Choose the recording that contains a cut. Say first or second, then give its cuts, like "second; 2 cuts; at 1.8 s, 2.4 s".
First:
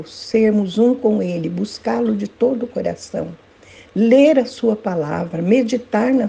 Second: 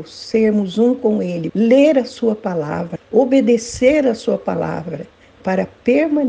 second; 2 cuts; at 1.5 s, 3.0 s